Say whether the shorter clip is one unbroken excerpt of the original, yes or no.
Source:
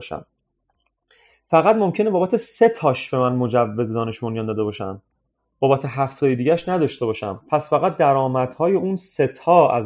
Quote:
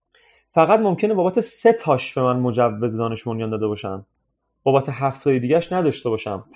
yes